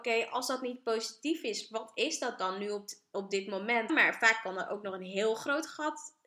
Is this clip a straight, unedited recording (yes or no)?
no